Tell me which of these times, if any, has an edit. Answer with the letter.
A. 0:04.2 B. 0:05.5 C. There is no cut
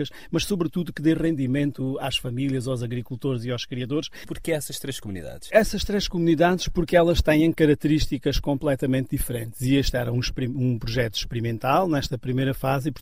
A